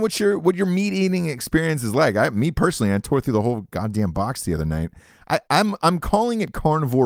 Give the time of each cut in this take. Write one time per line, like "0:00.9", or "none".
none